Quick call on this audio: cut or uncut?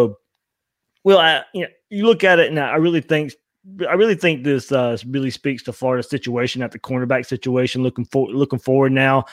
uncut